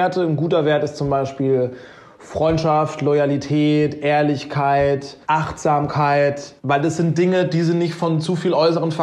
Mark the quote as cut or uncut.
cut